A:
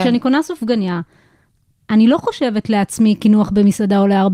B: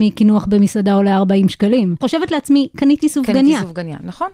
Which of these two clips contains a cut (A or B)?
B